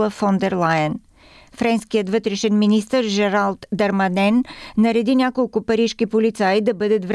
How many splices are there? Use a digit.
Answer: 0